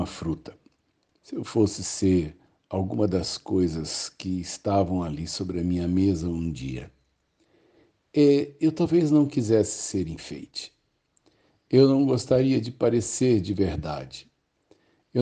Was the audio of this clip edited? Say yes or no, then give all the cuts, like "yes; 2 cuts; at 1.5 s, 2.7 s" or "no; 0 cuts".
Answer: no; 0 cuts